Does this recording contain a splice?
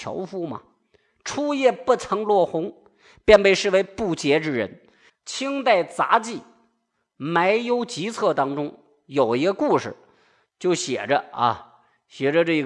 yes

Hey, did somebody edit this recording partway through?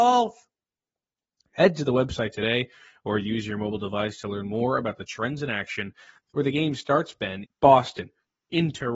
yes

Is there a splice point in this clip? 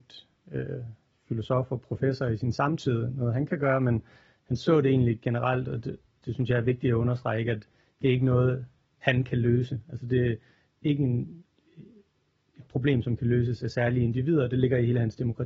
no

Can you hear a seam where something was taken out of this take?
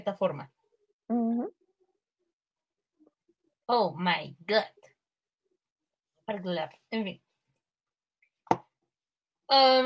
no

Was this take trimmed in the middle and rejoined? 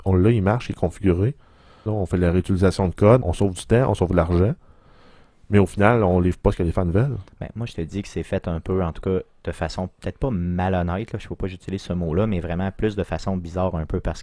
yes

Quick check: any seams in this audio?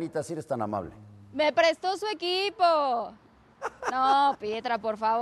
no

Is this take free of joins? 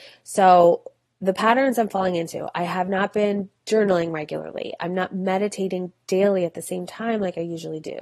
yes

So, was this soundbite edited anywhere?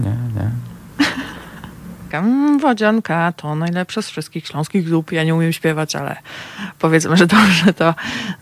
yes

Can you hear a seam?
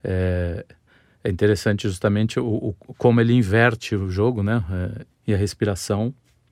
yes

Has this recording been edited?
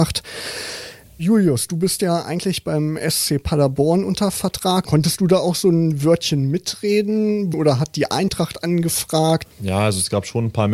yes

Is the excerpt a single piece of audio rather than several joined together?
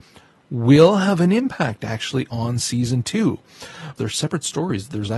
no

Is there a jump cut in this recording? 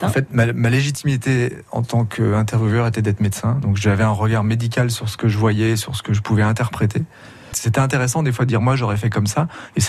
yes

